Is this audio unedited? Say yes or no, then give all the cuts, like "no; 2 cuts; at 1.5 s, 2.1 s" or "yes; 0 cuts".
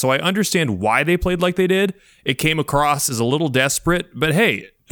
yes; 0 cuts